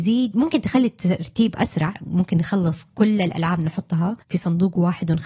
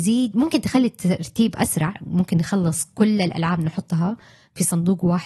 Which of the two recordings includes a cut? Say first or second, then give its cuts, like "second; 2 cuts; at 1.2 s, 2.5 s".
first; 1 cut; at 4.2 s